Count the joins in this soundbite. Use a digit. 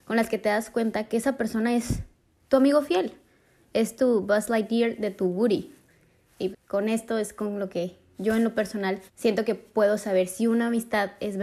2